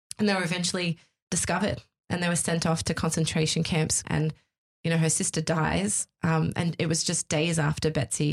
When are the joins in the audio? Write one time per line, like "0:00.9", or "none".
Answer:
0:04.0